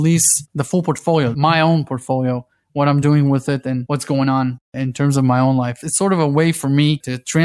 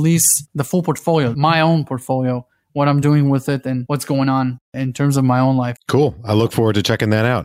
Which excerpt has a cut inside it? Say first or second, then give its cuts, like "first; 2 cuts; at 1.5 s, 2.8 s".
second; 1 cut; at 5.8 s